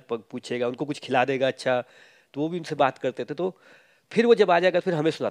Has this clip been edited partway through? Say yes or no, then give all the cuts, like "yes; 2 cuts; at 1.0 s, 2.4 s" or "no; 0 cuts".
no; 0 cuts